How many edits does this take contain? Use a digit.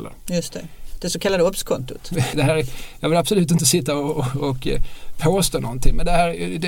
1